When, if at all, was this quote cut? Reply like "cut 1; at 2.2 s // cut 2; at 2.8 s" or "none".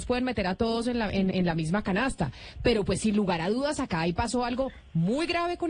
cut 1; at 1.3 s